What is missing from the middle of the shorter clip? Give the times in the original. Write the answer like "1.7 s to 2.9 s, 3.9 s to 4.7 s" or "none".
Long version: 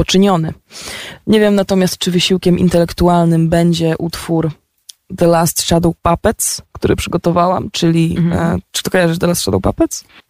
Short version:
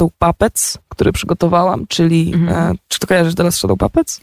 none